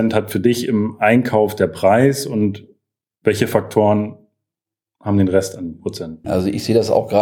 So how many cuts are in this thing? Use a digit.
1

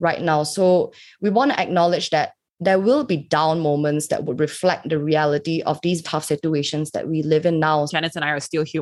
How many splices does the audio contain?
2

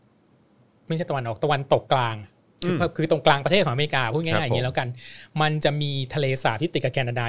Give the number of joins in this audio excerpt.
1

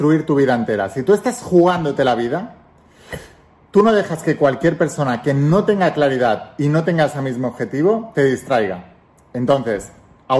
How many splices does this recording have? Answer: 0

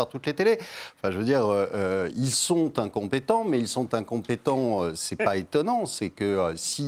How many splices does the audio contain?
0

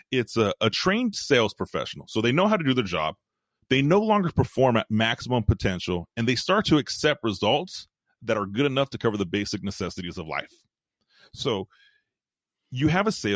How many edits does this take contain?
0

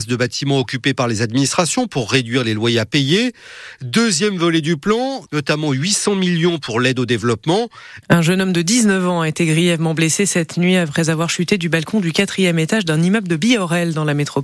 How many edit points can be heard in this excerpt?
2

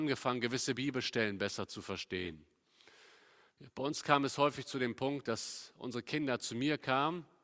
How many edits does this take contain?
0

